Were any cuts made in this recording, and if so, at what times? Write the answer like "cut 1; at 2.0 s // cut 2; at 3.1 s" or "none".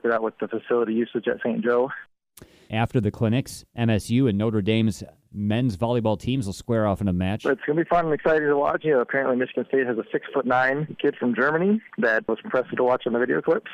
cut 1; at 2.7 s // cut 2; at 8.8 s // cut 3; at 12.4 s